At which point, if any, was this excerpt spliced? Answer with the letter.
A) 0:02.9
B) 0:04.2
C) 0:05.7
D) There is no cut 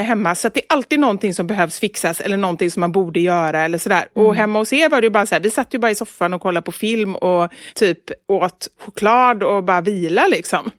D